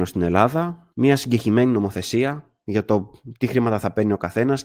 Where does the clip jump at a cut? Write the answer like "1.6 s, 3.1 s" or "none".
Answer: 0.9 s